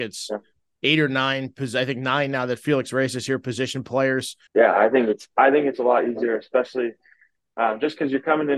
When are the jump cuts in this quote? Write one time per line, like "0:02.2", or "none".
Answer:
0:04.5